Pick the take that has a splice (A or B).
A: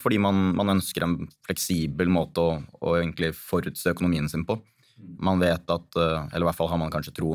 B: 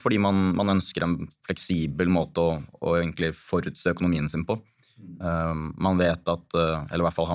A